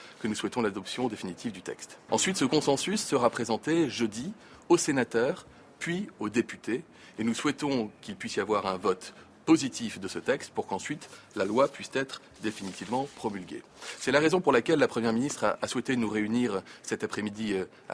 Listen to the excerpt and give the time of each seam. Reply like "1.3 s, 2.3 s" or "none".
2.1 s